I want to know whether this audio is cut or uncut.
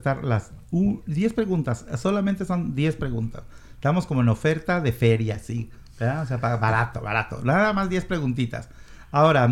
uncut